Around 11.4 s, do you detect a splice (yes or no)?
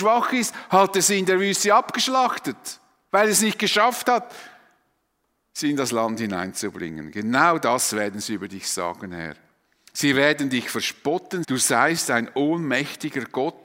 yes